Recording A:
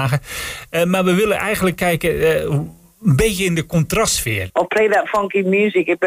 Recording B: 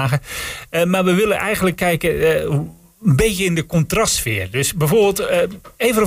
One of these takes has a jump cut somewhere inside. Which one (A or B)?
A